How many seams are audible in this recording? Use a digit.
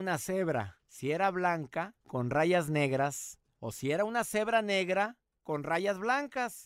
0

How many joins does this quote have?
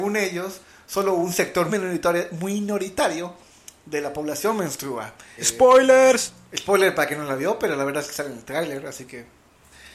2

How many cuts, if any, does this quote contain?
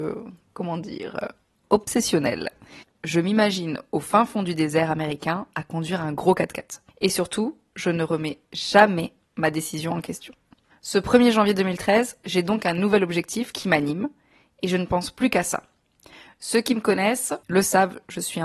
3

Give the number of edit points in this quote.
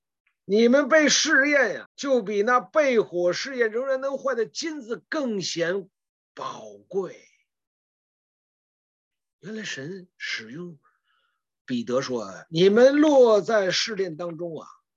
2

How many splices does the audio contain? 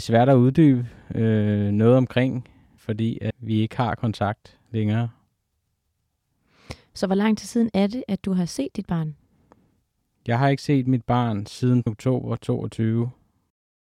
0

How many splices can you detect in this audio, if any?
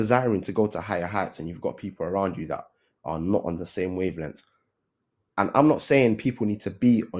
0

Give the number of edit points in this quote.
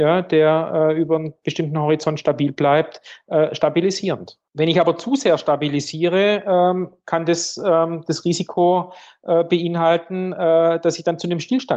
1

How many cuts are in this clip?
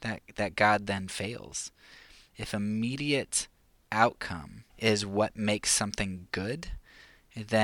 2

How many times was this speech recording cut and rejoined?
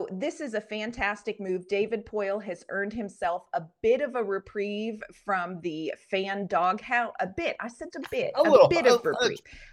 1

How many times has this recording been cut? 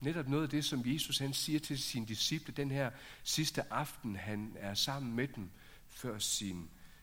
0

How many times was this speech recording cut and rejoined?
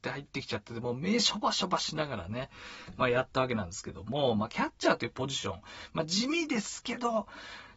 0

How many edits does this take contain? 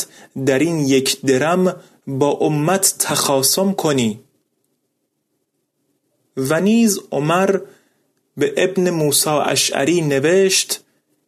0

